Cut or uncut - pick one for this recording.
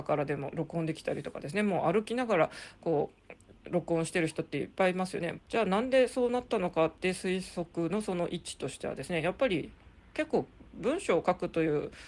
cut